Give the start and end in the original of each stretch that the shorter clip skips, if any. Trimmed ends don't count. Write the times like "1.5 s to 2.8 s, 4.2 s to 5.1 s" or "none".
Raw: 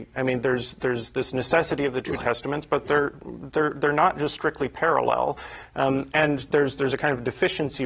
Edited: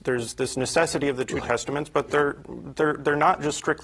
none